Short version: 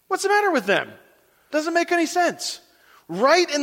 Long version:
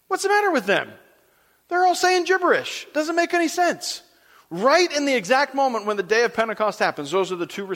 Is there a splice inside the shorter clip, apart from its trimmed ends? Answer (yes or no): yes